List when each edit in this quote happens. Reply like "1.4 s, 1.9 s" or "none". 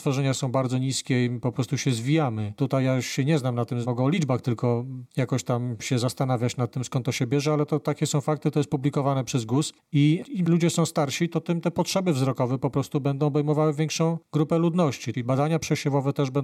15.1 s